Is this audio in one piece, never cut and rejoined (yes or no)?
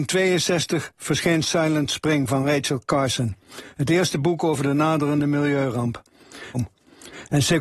no